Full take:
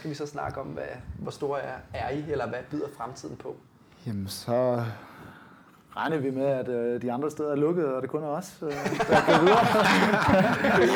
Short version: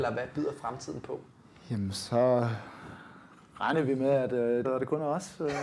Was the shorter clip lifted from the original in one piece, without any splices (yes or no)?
no